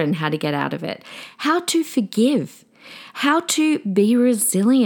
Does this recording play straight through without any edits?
yes; 0 cuts

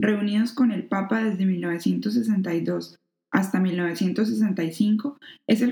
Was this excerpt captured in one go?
yes; 0 cuts

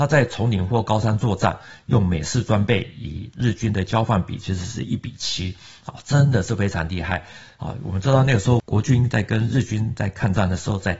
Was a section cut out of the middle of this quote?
no; 0 cuts

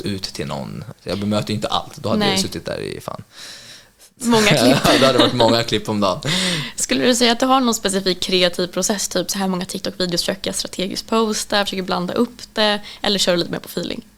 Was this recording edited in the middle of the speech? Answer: yes; 1 cut; at 0.9 s

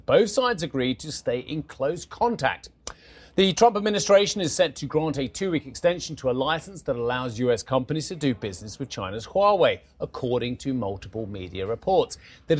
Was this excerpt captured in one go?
yes; 0 cuts

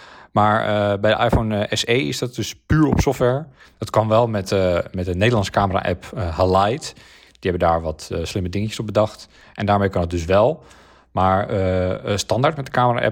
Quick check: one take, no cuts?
no; 1 cut; at 3.6 s

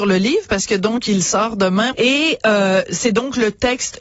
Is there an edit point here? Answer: yes; 1 cut; at 1.9 s

